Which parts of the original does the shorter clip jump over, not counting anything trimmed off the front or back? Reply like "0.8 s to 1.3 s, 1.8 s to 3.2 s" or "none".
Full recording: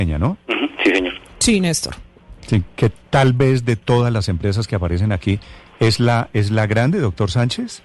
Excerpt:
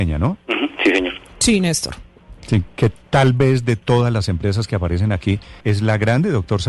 5.6 s to 6.3 s